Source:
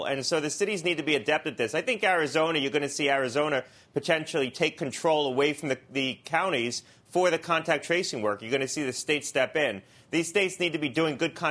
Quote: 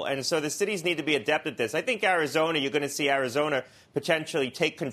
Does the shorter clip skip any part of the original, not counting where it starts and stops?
no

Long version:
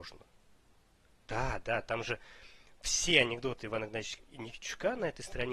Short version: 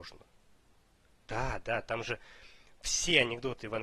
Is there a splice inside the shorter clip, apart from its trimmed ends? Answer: no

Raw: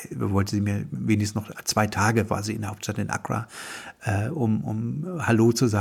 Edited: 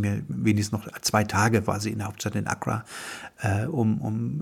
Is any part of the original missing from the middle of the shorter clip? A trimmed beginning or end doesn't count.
no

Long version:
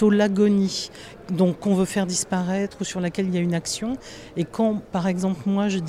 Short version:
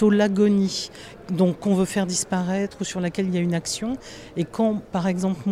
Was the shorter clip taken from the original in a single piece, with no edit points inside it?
yes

